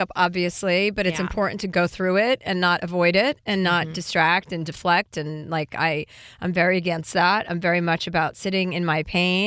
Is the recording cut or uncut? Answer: uncut